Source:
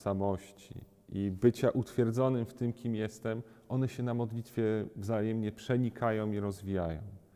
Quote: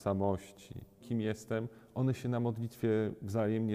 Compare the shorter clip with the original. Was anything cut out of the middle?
yes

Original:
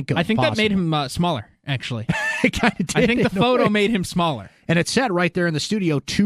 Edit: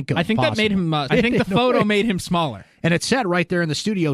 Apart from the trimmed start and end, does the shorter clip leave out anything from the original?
yes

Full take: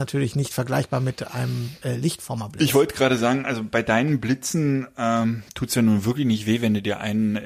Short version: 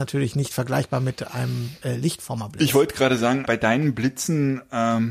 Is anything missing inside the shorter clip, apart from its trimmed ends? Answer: yes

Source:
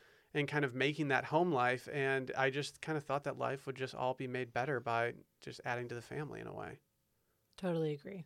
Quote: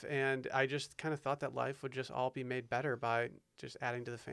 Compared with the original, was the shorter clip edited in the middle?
no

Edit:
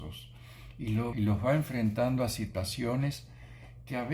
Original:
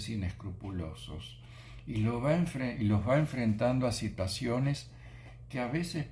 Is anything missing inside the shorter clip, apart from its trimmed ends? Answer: yes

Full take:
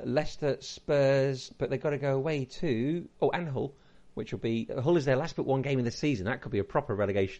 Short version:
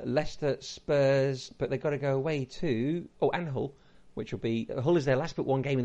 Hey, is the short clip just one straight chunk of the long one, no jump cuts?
yes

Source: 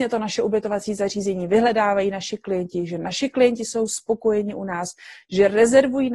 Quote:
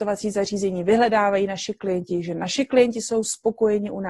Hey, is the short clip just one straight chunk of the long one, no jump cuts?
yes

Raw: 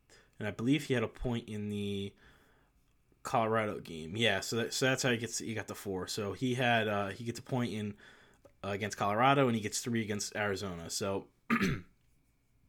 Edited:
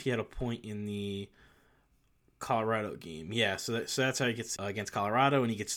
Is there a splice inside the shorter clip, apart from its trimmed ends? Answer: yes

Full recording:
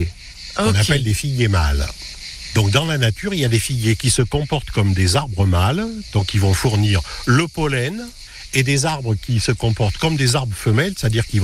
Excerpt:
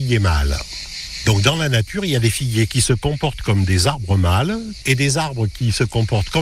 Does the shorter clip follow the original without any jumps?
no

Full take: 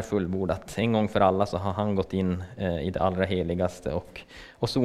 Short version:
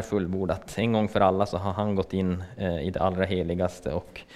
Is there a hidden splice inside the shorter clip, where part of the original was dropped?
no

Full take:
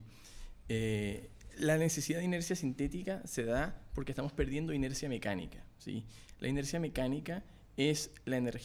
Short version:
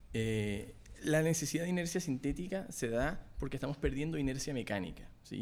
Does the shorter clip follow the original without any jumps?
yes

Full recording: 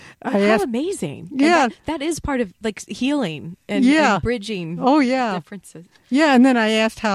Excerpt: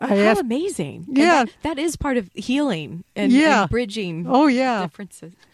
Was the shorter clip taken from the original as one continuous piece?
no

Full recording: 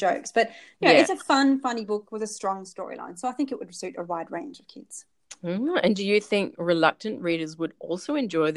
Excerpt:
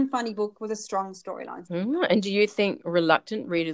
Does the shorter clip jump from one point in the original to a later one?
yes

